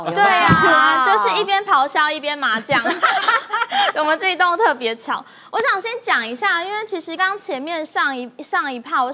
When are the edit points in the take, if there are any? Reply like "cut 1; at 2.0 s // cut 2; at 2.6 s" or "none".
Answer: cut 1; at 7.2 s

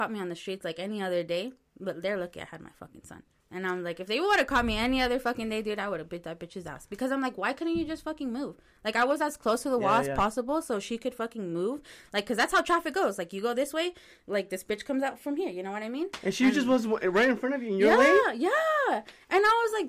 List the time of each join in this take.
none

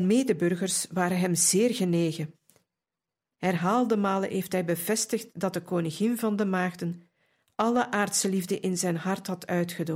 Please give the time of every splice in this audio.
cut 1; at 3.3 s

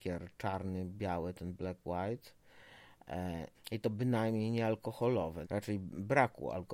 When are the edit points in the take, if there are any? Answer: cut 1; at 3.5 s // cut 2; at 5.4 s

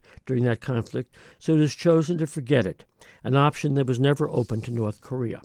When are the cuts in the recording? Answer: none

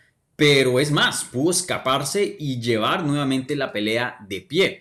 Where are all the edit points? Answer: none

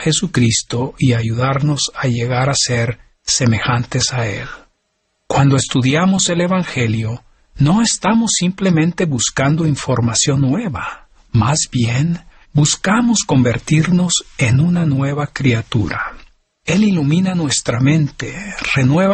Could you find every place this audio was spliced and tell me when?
cut 1; at 16.6 s

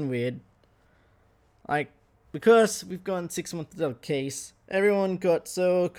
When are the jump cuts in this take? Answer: none

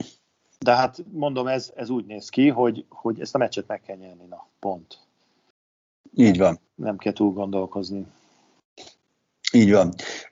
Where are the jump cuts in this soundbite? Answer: cut 1; at 1.7 s

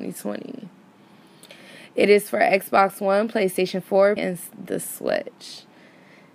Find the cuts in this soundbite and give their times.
cut 1; at 4.2 s

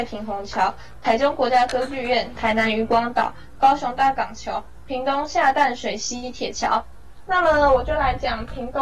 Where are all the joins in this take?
cut 1; at 2.4 s // cut 2; at 7.3 s

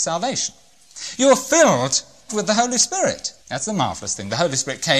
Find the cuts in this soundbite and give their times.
cut 1; at 2.3 s // cut 2; at 3.4 s

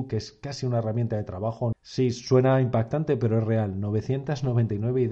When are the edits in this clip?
cut 1; at 1.7 s

